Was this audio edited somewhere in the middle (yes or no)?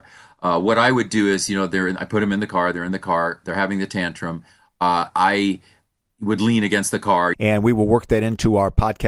yes